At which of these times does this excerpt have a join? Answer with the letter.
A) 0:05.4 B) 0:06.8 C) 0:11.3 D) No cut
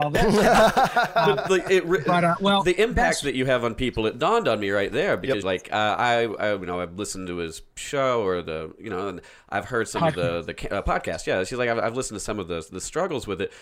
A